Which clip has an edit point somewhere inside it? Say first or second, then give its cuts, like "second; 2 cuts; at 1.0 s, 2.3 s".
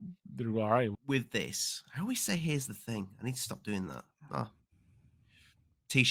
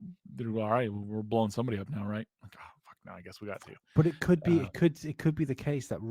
first; 1 cut; at 0.9 s